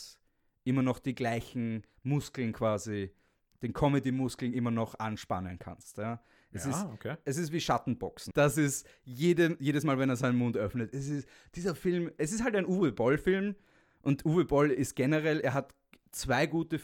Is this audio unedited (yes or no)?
no